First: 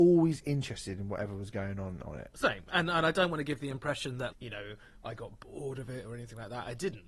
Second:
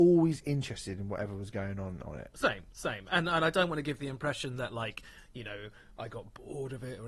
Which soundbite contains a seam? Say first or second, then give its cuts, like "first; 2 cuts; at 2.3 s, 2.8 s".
first; 2 cuts; at 2.7 s, 4.3 s